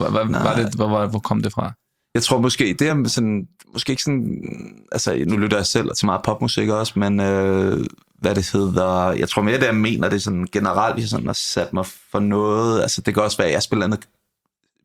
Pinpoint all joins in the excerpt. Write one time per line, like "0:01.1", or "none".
none